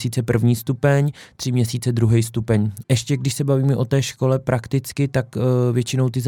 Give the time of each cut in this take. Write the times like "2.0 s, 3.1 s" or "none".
2.8 s

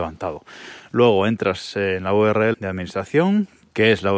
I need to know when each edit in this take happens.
2.5 s

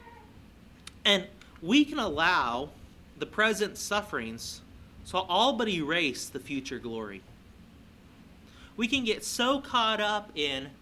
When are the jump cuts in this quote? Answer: none

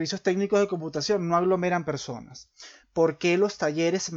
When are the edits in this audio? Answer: 2.8 s

